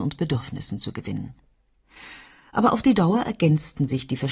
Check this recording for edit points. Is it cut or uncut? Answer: uncut